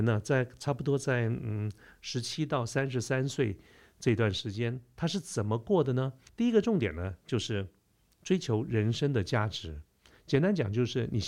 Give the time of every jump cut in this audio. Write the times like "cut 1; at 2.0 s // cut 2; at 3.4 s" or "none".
cut 1; at 6.3 s